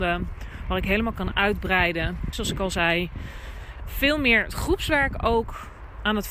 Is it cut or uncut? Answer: cut